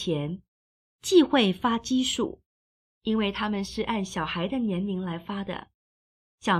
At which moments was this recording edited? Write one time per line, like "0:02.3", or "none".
0:02.9